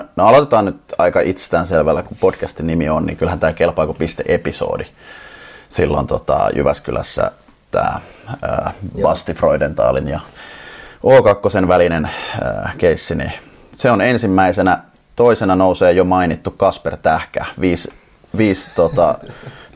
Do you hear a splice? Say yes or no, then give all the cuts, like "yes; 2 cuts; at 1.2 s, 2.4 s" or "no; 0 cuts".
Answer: no; 0 cuts